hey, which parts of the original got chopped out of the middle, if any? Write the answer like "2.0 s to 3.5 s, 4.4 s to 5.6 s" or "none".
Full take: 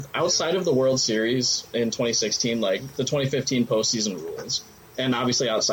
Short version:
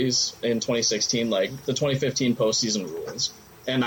none